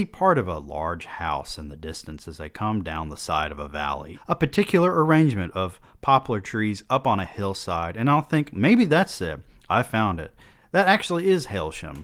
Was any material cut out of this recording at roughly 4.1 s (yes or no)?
yes